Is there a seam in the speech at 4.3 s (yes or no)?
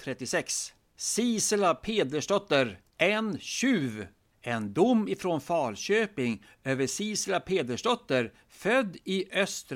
no